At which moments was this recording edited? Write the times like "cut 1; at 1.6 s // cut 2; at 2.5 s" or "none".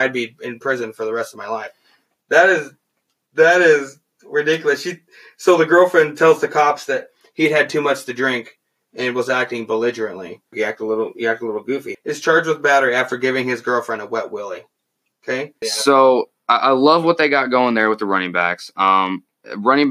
cut 1; at 10.5 s // cut 2; at 11.9 s // cut 3; at 15.6 s

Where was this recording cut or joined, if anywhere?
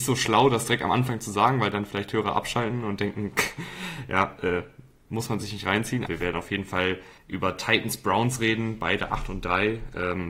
cut 1; at 6.1 s // cut 2; at 7.2 s

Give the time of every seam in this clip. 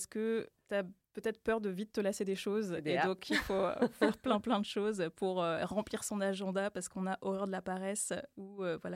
none

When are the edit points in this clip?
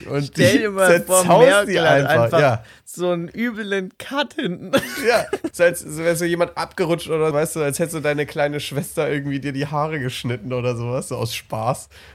cut 1; at 5.5 s // cut 2; at 7.3 s

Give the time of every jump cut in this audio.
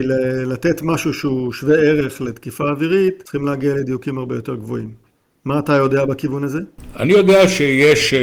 none

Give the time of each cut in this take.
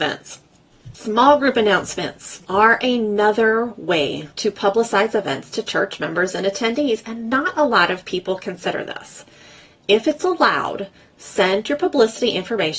none

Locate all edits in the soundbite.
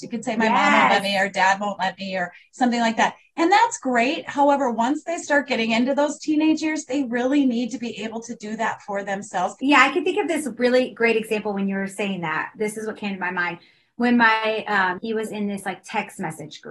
cut 1; at 15.0 s

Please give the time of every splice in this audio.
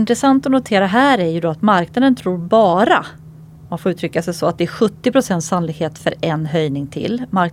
none

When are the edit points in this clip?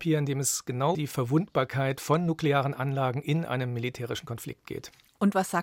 cut 1; at 0.9 s

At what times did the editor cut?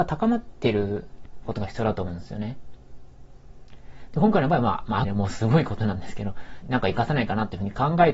cut 1; at 5.0 s // cut 2; at 6.6 s

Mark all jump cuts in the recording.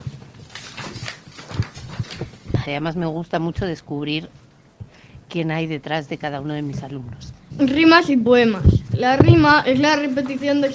cut 1; at 2.6 s // cut 2; at 7.5 s

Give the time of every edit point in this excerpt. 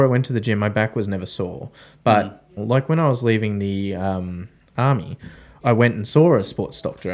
cut 1; at 2.6 s // cut 2; at 5.6 s

